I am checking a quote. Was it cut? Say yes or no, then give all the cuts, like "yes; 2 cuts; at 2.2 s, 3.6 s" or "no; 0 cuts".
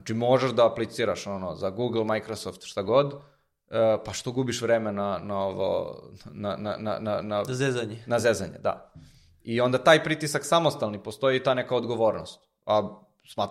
no; 0 cuts